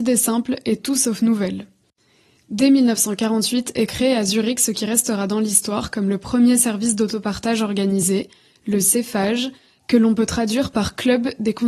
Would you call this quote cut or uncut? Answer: uncut